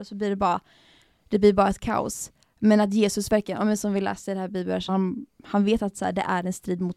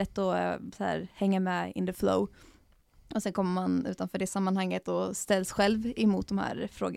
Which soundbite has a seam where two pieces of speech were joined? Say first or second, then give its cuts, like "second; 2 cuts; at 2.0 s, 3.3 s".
first; 1 cut; at 4.9 s